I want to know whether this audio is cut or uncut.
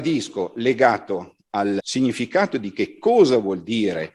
cut